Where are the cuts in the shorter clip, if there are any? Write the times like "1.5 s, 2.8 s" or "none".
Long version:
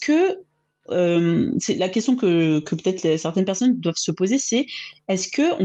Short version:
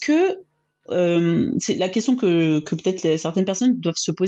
none

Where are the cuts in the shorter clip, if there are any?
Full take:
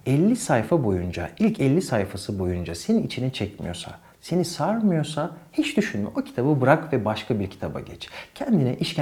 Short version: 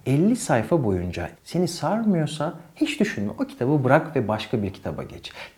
1.3 s

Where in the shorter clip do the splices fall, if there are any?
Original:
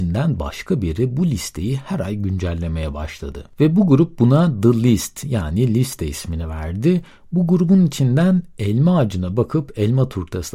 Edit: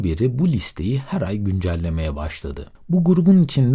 2.8 s

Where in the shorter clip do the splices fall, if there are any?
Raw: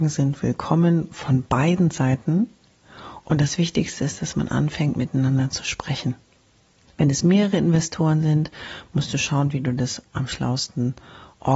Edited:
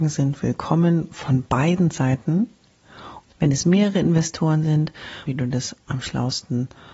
3.2 s, 5.3 s

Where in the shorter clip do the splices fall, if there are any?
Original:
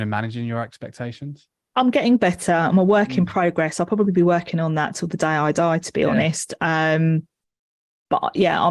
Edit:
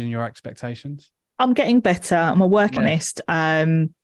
2.8 s

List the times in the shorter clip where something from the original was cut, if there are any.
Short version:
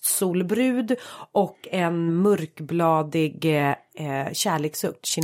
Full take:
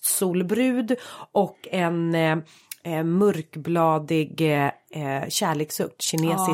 2.1 s

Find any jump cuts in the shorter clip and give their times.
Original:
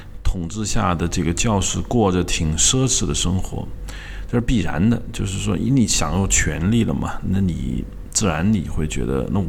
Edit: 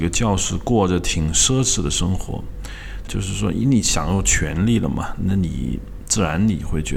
3.1 s

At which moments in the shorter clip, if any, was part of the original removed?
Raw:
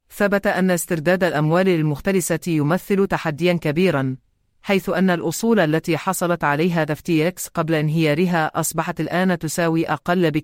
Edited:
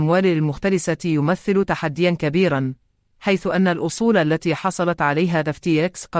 none

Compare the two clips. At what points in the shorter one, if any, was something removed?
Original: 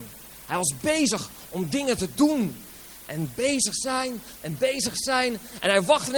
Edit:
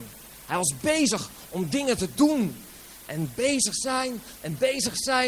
none

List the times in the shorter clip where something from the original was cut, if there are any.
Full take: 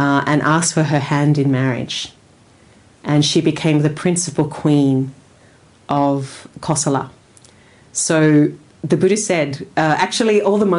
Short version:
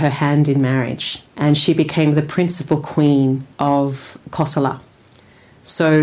1.3 s, 3.5 s

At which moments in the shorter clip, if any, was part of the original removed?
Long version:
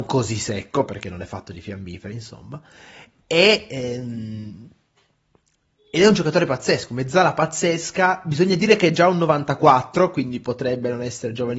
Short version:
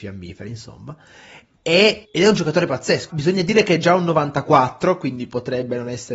2.0 s, 3.1 s

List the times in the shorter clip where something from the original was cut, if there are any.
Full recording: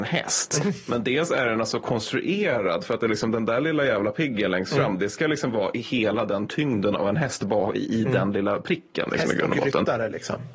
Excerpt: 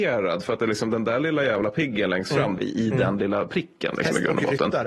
2.6 s

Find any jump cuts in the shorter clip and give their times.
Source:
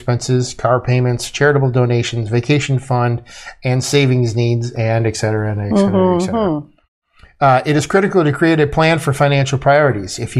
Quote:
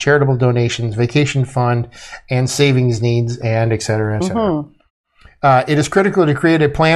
4.2 s

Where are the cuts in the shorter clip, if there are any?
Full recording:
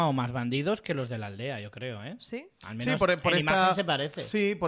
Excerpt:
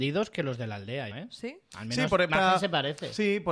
1.1 s, 2.3 s

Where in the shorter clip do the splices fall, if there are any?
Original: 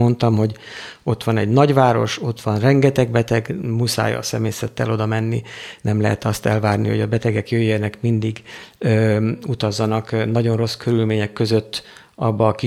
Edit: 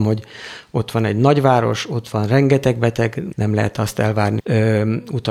3.3 s, 4.4 s

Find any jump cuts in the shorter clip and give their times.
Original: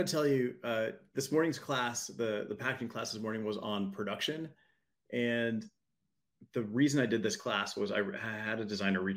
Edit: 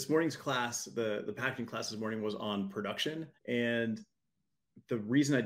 3.4 s

